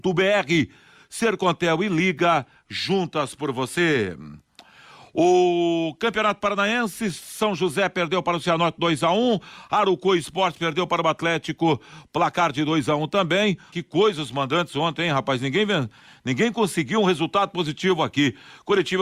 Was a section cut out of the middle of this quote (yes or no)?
yes